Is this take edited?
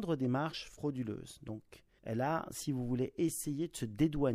yes; 1 cut; at 2.0 s

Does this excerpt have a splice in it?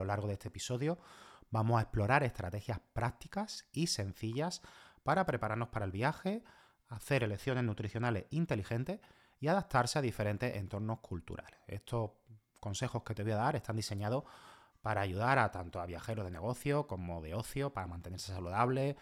no; 0 cuts

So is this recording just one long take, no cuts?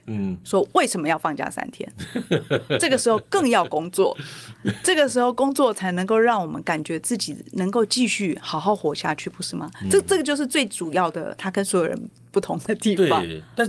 yes; 0 cuts

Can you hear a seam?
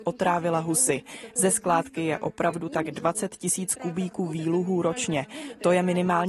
no; 0 cuts

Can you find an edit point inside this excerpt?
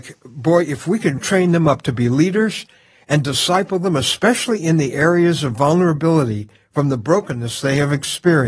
yes; 1 cut; at 1.2 s

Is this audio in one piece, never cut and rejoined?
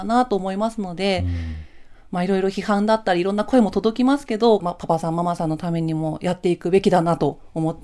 no; 1 cut; at 4.6 s

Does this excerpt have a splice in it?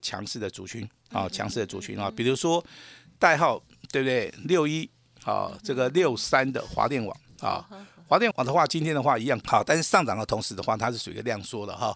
yes; 2 cuts; at 8.3 s, 9.4 s

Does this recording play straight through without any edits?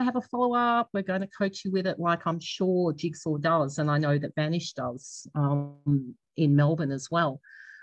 yes; 0 cuts

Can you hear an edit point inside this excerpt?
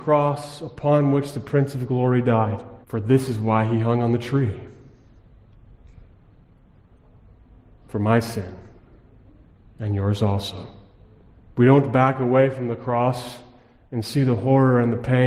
yes; 2 cuts; at 2.8 s, 11.5 s

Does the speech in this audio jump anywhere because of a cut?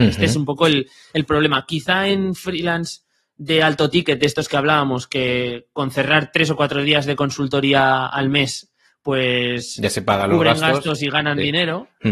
no; 0 cuts

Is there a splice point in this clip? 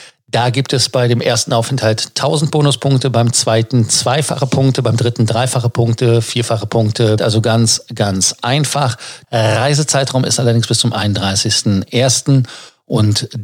yes; 2 cuts; at 7.2 s, 9.2 s

